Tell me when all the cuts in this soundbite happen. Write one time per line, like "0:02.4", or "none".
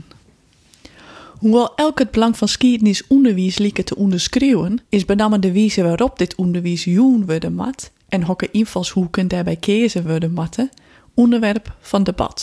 0:04.9